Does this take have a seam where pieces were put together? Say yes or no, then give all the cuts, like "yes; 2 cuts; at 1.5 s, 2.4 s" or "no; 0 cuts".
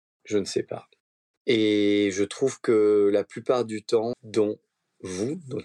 yes; 2 cuts; at 1.3 s, 4.1 s